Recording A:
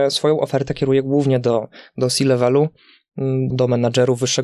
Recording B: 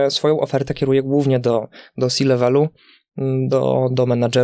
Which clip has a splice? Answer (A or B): A